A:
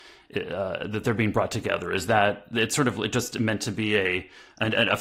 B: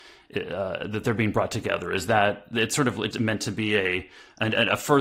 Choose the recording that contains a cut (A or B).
B